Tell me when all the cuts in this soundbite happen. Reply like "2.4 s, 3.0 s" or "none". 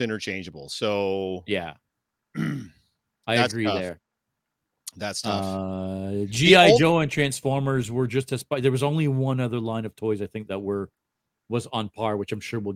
none